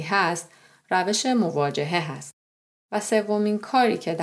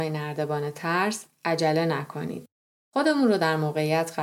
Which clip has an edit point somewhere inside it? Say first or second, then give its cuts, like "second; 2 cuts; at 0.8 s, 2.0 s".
second; 1 cut; at 2.8 s